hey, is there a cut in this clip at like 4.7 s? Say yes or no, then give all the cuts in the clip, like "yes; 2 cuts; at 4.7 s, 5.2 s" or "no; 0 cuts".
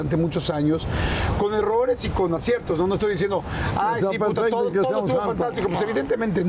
no; 0 cuts